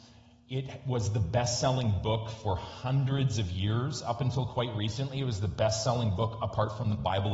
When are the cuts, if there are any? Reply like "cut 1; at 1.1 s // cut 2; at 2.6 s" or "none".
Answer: none